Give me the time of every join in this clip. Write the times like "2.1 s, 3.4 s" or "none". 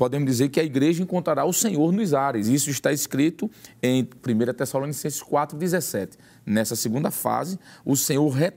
none